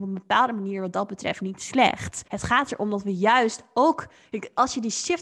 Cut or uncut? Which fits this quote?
cut